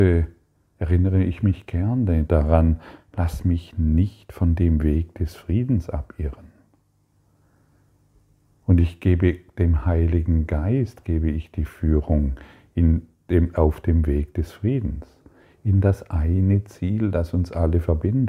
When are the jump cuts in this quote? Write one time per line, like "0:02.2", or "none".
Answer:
none